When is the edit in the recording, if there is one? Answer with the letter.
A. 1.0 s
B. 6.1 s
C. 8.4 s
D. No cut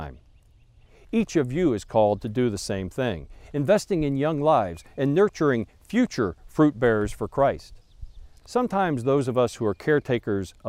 C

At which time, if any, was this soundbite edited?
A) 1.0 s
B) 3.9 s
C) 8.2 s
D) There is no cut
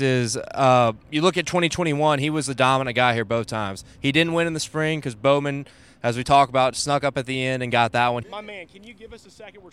C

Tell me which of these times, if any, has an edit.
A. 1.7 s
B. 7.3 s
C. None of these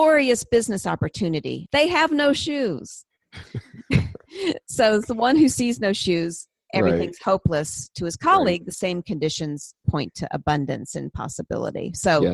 A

